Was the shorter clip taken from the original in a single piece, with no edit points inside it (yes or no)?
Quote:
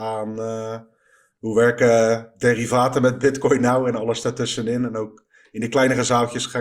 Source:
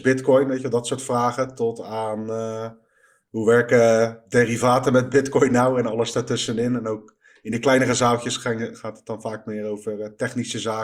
yes